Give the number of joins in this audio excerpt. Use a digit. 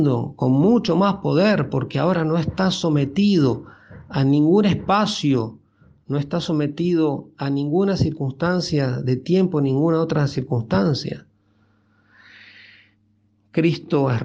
0